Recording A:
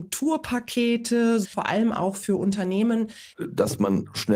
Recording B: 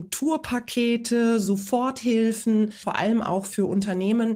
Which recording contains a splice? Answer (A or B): A